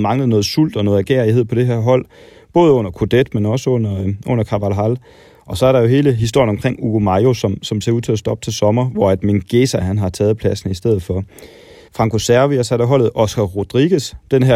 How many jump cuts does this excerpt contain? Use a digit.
1